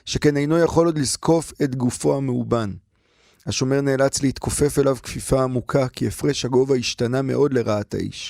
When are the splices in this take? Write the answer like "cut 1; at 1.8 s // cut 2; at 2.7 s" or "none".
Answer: none